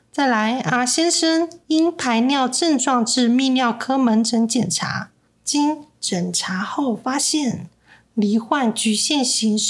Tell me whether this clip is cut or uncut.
cut